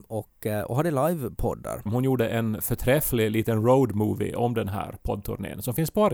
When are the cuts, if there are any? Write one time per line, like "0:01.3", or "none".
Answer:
0:01.9